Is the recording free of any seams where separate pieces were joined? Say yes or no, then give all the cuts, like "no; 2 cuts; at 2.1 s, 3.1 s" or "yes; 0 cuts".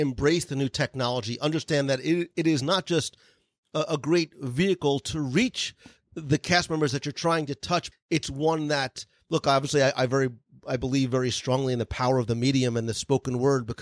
no; 1 cut; at 7.9 s